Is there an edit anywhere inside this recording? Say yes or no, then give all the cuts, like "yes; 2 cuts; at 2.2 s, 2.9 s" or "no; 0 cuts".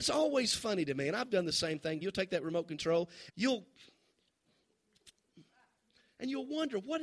yes; 2 cuts; at 2.0 s, 3.3 s